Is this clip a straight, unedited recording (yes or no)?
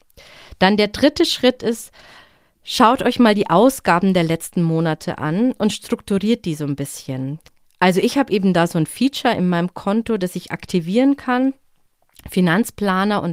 yes